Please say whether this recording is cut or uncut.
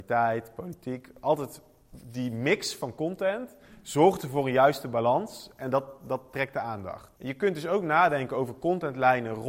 cut